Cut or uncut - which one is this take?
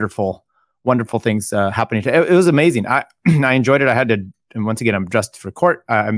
uncut